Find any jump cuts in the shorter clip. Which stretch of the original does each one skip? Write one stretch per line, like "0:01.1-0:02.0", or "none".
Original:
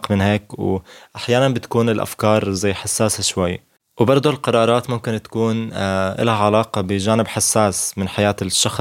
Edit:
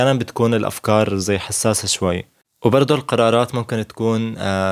none